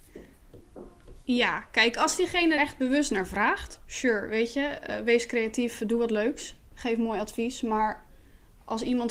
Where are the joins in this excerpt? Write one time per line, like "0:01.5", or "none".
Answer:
0:02.6